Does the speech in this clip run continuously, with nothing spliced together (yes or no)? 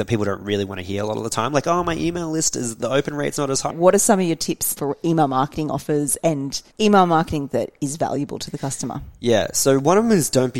no